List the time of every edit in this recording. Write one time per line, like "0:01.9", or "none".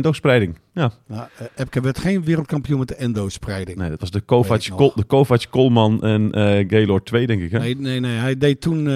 none